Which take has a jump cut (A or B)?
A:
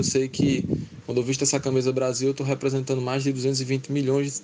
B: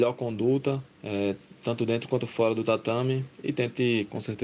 B